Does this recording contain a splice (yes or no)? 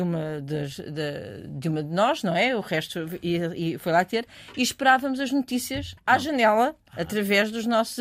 no